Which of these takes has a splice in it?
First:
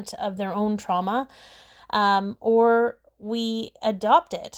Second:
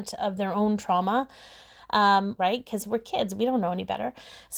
second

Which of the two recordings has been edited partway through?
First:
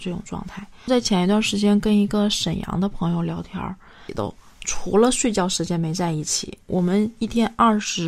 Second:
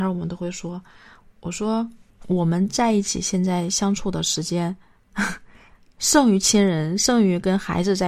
first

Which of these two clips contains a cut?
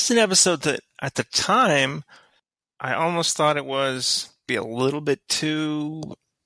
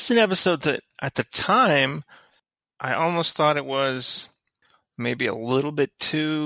first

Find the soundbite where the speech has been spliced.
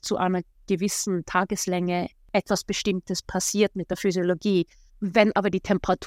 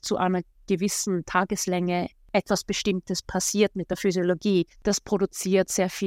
second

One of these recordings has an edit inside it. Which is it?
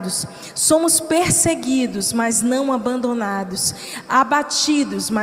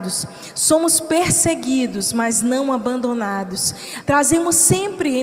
second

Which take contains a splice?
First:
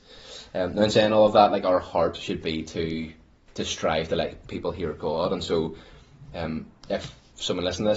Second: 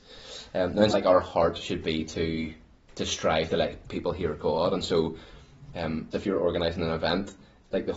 second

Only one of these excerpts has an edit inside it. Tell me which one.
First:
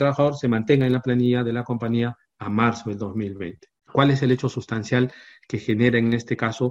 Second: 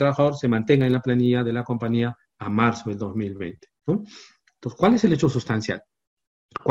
first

